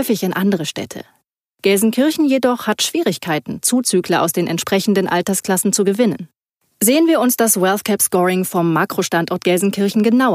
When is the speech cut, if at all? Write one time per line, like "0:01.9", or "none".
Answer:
none